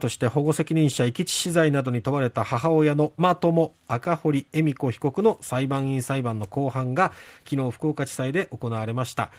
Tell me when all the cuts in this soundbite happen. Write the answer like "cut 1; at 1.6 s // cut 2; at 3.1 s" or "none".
cut 1; at 3.2 s